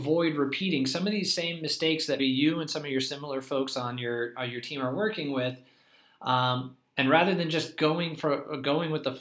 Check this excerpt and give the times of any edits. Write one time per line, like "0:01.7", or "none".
0:02.2